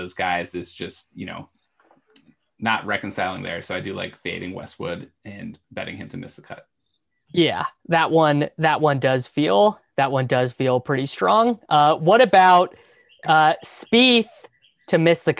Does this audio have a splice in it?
no; 0 cuts

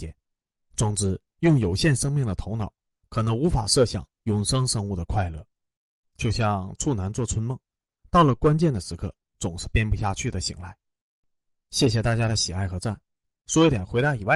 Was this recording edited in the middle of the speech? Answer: no; 0 cuts

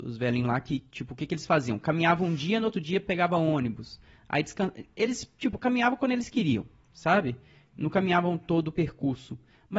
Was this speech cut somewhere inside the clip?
yes; 1 cut; at 3.1 s

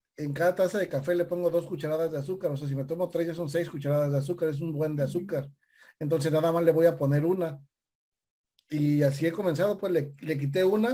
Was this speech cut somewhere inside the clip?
no; 0 cuts

